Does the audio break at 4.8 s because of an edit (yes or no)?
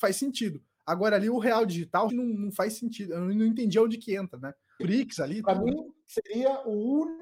yes